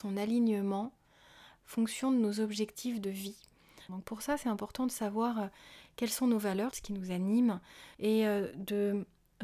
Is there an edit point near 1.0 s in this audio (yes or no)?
no